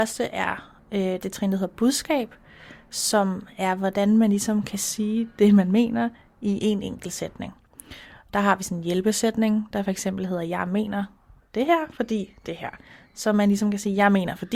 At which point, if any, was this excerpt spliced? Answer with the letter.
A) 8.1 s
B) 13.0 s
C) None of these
C